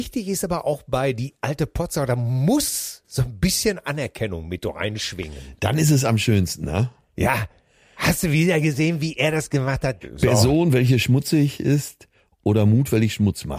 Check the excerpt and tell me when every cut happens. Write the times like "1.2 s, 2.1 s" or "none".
10.0 s